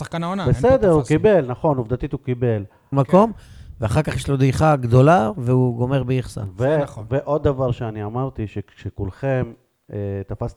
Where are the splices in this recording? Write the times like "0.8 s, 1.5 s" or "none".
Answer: 2.9 s

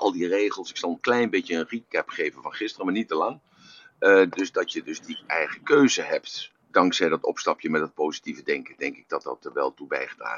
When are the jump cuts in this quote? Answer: 1.0 s, 4.3 s, 6.6 s

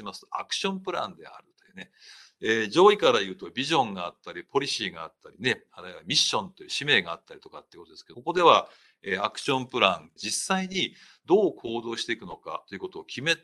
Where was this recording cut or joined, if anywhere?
8.1 s, 10.2 s

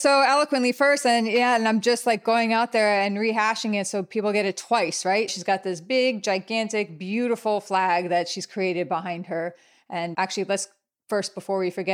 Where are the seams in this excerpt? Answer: 5.3 s, 10.1 s

